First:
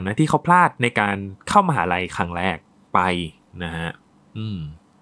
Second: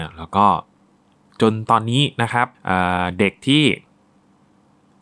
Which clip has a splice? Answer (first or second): second